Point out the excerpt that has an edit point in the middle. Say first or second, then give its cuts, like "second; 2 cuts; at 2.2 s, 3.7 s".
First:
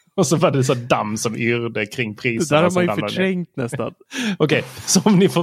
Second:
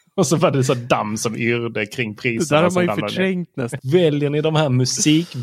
second; 1 cut; at 3.8 s